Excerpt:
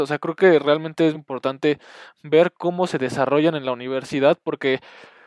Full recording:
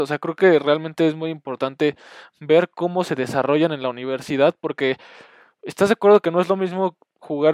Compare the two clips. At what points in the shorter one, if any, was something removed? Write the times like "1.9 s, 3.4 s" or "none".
1.1 s